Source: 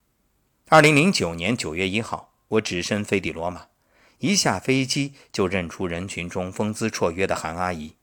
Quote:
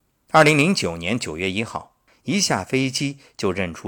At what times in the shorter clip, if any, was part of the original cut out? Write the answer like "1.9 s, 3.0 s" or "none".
2.1 s